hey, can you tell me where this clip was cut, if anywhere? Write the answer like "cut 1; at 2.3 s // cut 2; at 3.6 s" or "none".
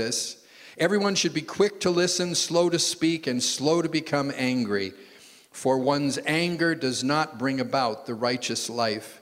none